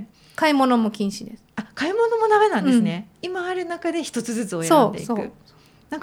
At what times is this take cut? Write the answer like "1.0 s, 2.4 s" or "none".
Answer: 3.1 s